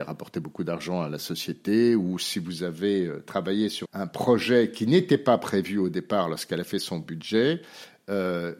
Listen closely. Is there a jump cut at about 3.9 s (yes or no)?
yes